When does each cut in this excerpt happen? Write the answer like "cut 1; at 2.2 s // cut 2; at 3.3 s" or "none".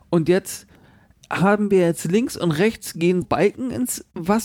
cut 1; at 3.2 s

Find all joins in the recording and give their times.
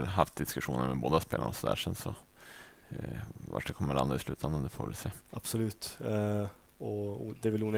cut 1; at 5.2 s

